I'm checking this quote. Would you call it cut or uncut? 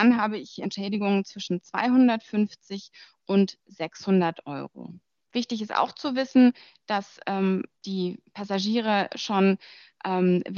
cut